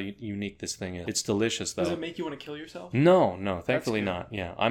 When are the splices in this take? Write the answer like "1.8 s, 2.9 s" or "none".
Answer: 1.0 s